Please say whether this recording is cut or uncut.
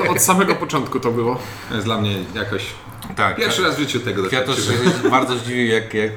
uncut